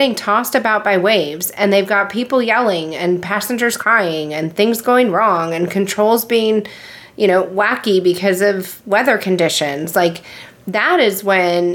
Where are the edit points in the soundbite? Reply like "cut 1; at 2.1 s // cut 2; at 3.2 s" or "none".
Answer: none